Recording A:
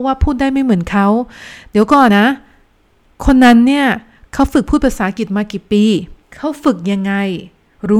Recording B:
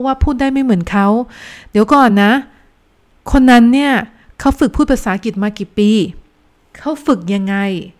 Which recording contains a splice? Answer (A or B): A